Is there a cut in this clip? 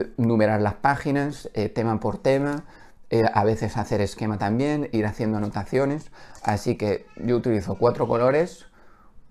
no; 0 cuts

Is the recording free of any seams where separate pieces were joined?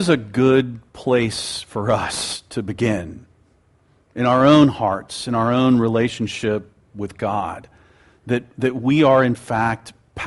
yes; 0 cuts

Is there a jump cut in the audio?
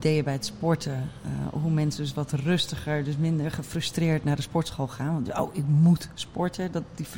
no; 0 cuts

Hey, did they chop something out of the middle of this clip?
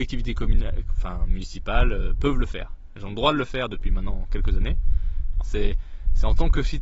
yes; 1 cut; at 5.4 s

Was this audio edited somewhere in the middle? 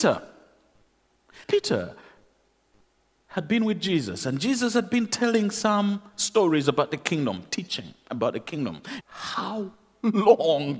yes; 2 cuts; at 1.4 s, 9.0 s

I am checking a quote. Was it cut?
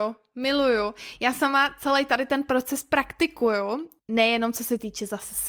no; 0 cuts

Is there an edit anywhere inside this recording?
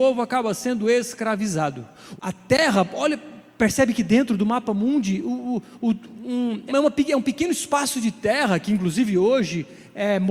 yes; 2 cuts; at 2.2 s, 6.7 s

